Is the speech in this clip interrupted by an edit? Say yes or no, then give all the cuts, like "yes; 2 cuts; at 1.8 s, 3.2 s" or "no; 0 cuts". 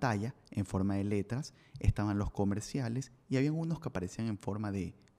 no; 0 cuts